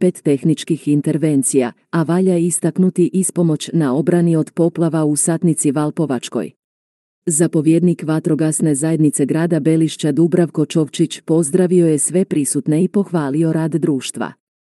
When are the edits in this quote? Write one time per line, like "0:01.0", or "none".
0:01.8